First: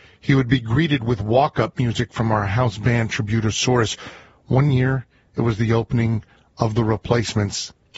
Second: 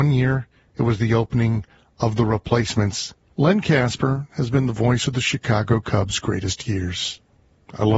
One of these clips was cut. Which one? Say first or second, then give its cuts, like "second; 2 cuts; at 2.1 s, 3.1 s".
second; 1 cut; at 3.3 s